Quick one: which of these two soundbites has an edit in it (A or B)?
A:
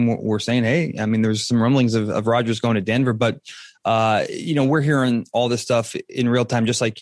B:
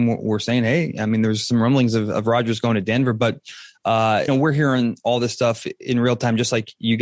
B